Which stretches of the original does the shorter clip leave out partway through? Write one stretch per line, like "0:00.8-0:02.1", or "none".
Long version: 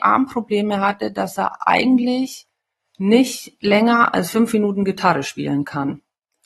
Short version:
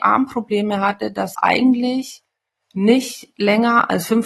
0:01.4-0:01.6